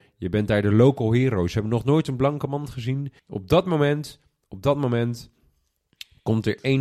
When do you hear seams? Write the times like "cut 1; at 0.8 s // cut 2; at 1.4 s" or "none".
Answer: cut 1; at 3.2 s